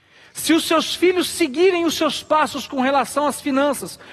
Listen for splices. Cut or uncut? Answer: uncut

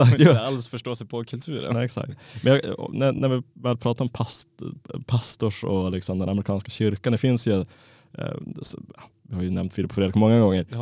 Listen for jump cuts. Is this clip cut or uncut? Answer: uncut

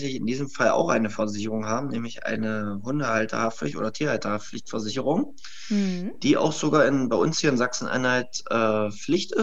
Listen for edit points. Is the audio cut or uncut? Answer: uncut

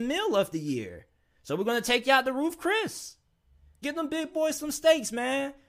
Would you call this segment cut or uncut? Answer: cut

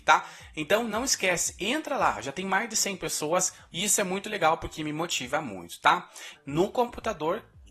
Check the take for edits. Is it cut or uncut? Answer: cut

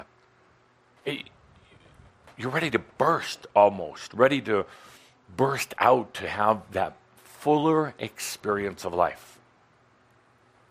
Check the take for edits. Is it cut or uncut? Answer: cut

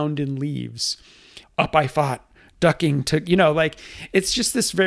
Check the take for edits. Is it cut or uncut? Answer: cut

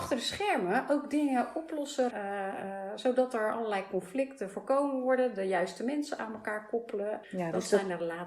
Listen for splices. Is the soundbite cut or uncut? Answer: cut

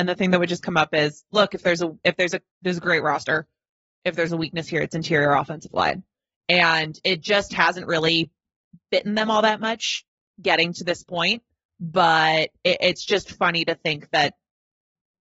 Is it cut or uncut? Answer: uncut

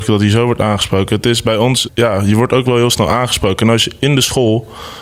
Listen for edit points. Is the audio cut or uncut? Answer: cut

